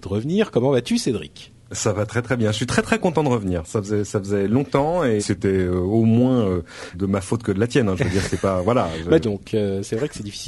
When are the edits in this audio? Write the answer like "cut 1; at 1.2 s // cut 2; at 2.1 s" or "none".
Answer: cut 1; at 5.2 s // cut 2; at 6.9 s // cut 3; at 9.2 s